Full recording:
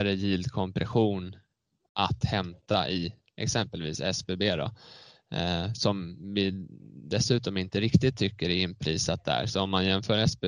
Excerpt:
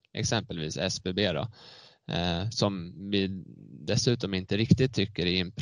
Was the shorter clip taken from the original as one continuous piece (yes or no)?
yes